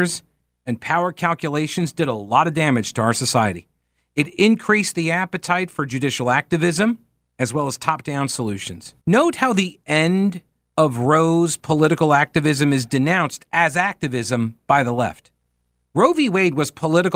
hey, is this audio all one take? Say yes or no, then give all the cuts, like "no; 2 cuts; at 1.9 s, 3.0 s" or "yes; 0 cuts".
no; 2 cuts; at 9.0 s, 15.8 s